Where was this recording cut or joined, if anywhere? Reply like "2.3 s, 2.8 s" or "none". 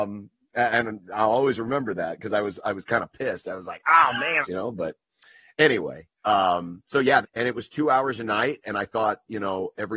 4.4 s, 7.2 s, 8.6 s